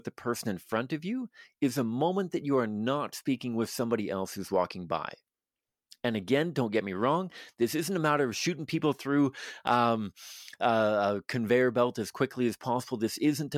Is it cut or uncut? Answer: uncut